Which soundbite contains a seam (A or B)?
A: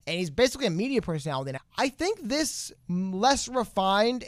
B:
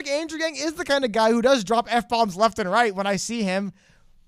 A